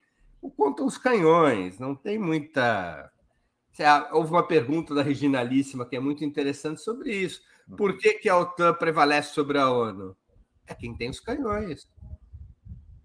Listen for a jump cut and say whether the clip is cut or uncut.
uncut